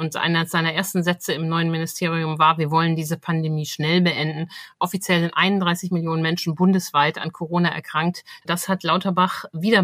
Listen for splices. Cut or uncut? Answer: cut